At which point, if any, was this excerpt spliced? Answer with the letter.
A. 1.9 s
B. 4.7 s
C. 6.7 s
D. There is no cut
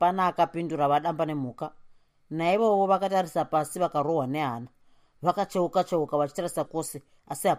C